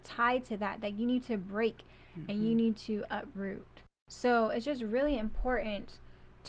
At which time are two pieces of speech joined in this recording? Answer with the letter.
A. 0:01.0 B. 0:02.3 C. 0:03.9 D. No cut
D